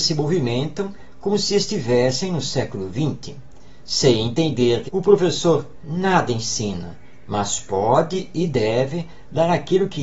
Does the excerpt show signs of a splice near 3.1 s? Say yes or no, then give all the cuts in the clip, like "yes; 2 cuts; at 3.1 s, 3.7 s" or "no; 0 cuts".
no; 2 cuts; at 4.9 s, 7.3 s